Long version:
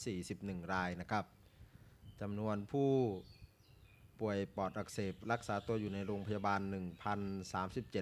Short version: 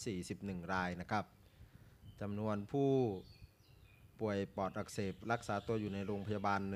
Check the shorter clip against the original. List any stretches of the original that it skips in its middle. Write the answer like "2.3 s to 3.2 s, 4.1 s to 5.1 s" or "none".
none